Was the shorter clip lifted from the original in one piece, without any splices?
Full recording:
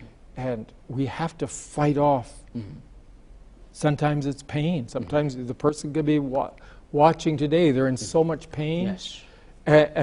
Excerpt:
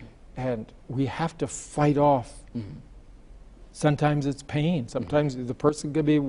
yes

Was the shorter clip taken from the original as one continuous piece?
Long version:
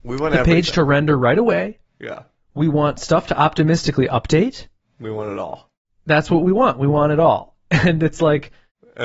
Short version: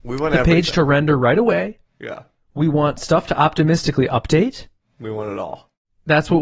yes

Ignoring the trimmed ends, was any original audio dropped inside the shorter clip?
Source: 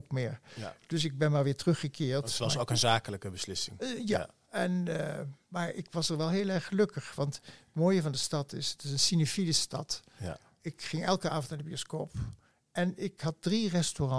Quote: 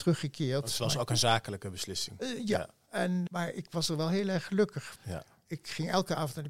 yes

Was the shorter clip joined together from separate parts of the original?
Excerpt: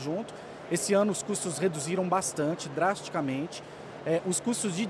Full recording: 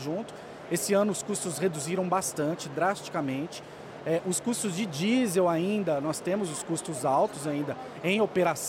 no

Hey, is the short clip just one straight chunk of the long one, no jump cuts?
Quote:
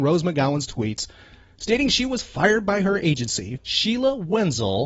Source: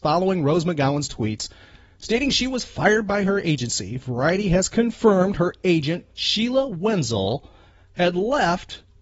no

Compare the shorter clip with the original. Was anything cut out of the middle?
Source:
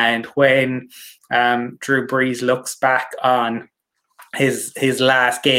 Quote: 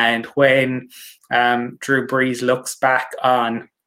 no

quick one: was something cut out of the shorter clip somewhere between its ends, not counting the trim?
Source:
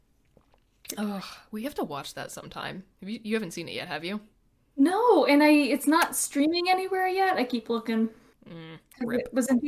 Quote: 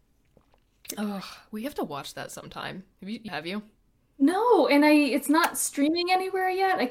yes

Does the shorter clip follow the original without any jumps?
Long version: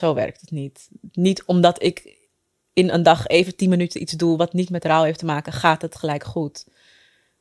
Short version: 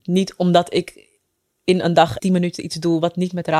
no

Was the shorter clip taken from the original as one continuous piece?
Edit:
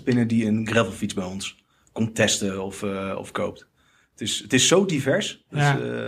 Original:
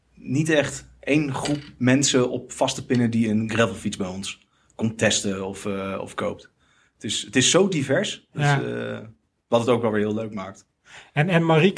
yes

